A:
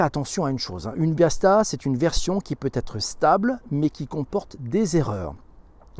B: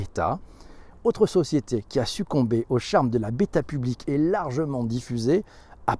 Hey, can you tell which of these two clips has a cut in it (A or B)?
B